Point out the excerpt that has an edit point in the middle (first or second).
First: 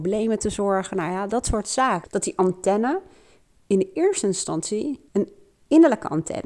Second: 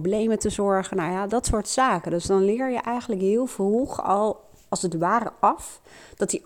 first